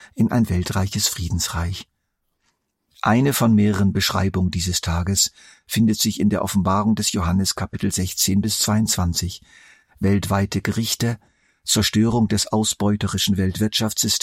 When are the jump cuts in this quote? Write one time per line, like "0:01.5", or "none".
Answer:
none